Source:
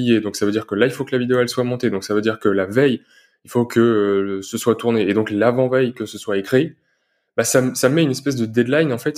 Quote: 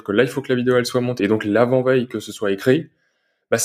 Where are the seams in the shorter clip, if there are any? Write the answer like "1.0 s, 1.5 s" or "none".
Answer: 1.2 s